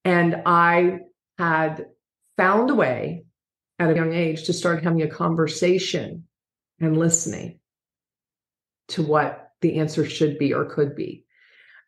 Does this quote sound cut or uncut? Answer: cut